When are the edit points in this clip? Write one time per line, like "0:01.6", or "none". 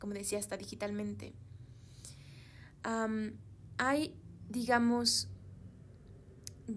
none